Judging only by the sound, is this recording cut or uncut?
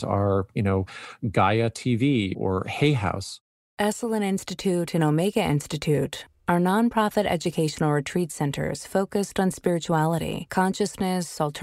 uncut